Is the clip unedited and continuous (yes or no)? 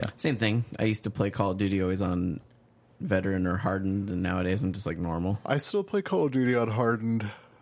yes